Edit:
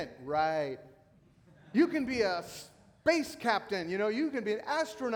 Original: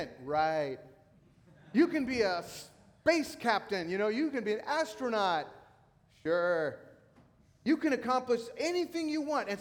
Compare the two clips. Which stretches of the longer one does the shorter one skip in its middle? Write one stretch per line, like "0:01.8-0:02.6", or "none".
none